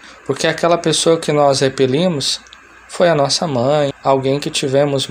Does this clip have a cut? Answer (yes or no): yes